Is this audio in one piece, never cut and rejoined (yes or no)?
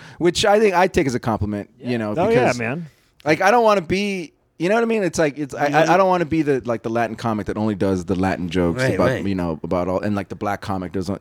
yes